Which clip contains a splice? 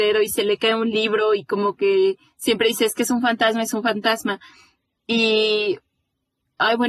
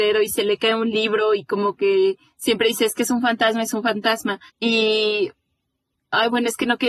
second; 1 cut; at 4.5 s

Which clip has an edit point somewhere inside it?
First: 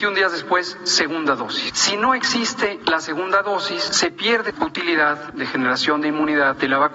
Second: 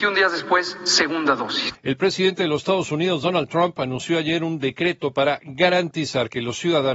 second; 1 cut; at 1.7 s

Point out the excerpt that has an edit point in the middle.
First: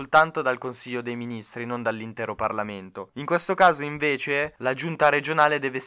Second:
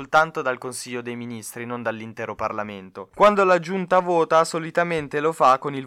second; 1 cut; at 3.1 s

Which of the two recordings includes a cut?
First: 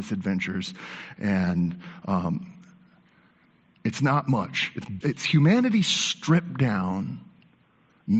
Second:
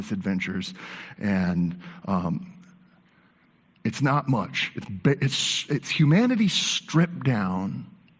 first; 1 cut; at 5.0 s

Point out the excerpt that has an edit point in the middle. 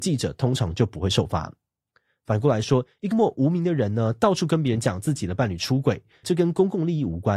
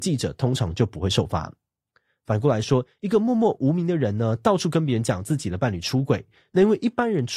first; 2 cuts; at 3.1 s, 6.2 s

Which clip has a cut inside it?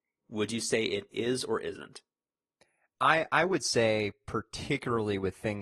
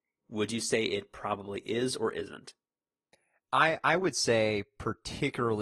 first; 1 cut; at 1.1 s

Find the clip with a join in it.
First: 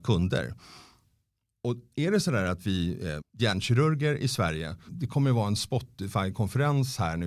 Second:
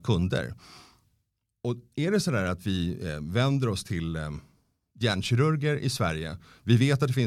first; 2 cuts; at 3.2 s, 4.9 s

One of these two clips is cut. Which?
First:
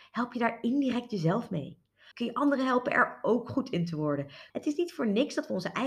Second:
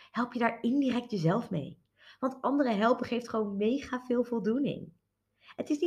first; 2 cuts; at 2.1 s, 4.5 s

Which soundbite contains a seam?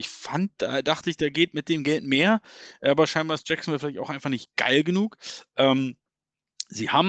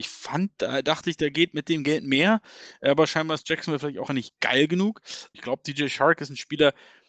second; 2 cuts; at 4.1 s, 5.3 s

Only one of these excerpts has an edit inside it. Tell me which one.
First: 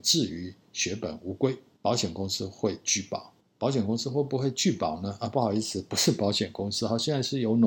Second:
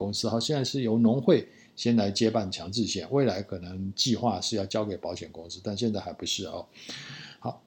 first; 2 cuts; at 1.8 s, 3.4 s

